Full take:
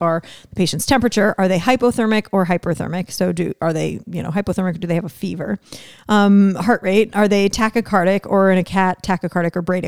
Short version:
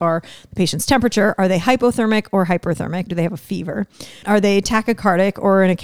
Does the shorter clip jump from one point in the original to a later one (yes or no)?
yes